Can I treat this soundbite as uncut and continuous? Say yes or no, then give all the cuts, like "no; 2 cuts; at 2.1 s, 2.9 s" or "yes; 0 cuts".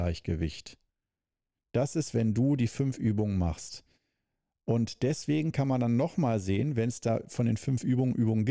no; 1 cut; at 1.5 s